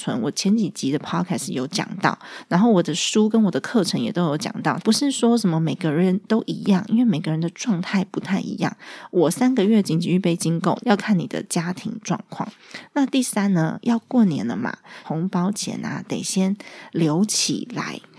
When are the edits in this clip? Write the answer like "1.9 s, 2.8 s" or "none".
4.8 s, 10.8 s, 15.0 s